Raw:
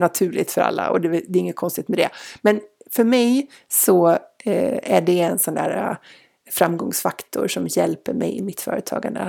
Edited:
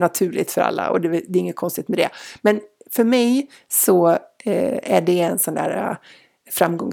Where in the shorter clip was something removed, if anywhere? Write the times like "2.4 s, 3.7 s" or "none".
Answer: none